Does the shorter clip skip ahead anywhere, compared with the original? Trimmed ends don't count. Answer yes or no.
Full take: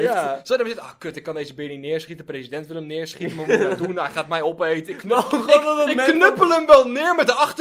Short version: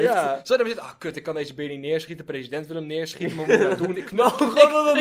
yes